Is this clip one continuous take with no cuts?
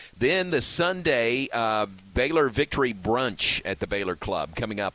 yes; 0 cuts

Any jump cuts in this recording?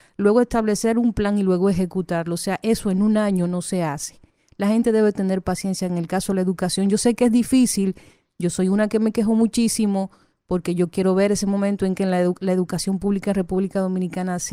no; 0 cuts

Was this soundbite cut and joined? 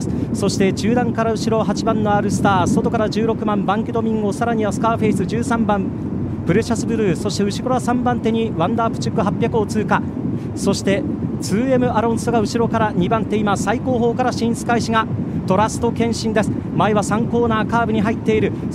no; 0 cuts

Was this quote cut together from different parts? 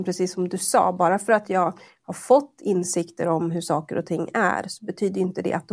no; 0 cuts

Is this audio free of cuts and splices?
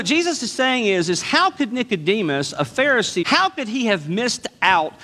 no; 1 cut; at 3.2 s

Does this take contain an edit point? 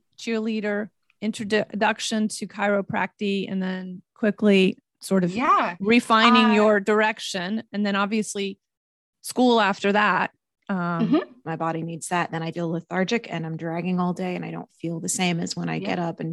yes; 2 cuts; at 11.4 s, 12.5 s

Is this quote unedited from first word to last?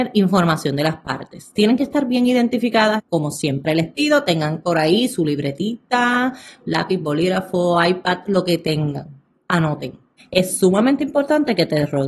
no; 2 cuts; at 3.0 s, 10.2 s

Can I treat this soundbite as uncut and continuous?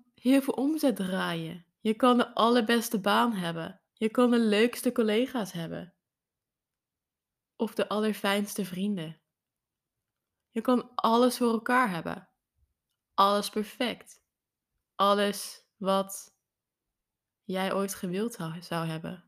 yes; 0 cuts

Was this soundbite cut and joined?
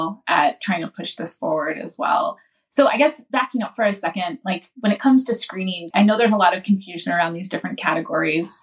yes; 1 cut; at 5.9 s

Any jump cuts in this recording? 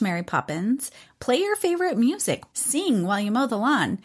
yes; 2 cuts; at 1.1 s, 2.5 s

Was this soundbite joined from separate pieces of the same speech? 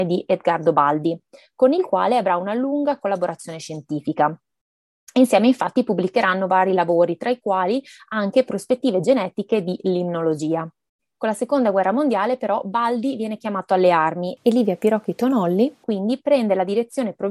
no; 0 cuts

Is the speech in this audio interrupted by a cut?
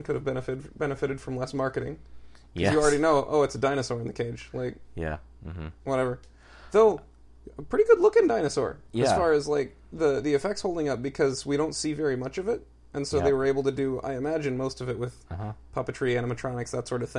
no; 0 cuts

